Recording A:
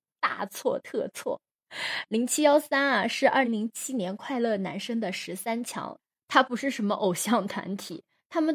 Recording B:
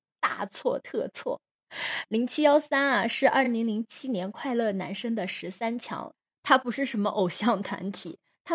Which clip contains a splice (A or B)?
A